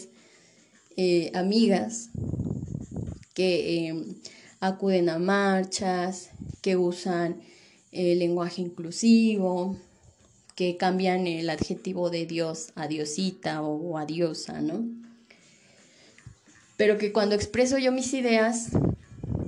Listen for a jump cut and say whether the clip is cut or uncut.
uncut